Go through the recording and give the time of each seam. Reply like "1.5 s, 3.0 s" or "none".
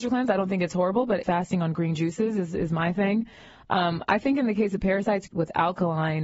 5.3 s